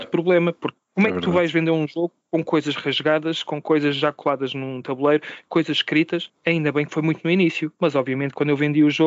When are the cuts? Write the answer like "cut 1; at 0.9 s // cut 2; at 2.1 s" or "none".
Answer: none